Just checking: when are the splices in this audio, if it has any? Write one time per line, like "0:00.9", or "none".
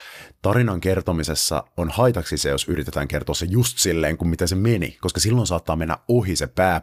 none